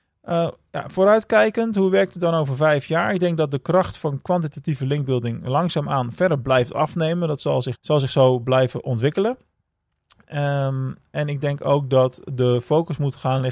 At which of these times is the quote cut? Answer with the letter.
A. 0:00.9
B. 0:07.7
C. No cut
B